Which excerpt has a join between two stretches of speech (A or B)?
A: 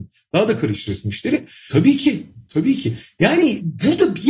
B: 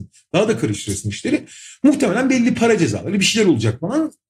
A